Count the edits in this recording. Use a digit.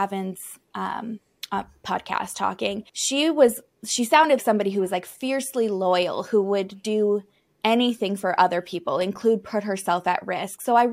2